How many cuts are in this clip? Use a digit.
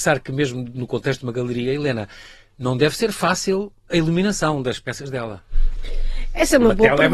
1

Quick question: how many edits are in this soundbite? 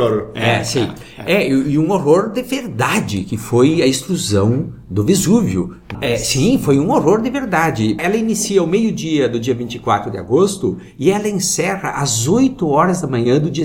2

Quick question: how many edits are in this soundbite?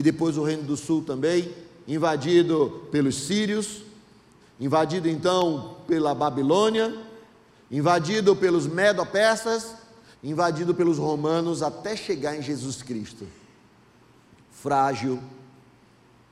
3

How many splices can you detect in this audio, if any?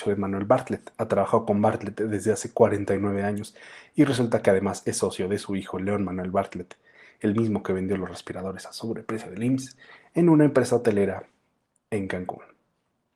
0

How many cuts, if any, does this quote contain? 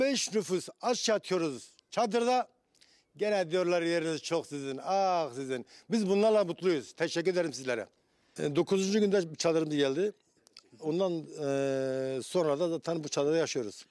1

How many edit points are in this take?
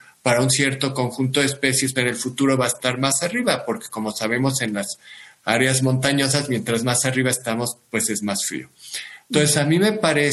1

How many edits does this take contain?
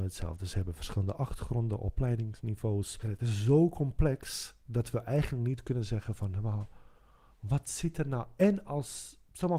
0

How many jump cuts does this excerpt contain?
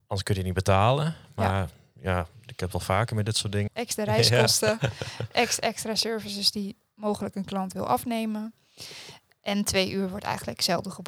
1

